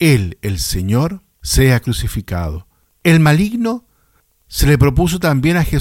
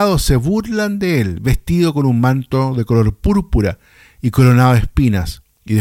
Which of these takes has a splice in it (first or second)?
first